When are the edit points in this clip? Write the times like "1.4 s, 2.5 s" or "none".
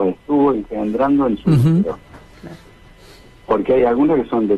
none